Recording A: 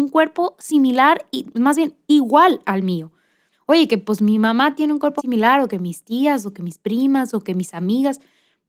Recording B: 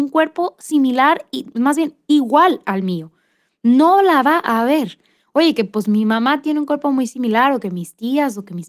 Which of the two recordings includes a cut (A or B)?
A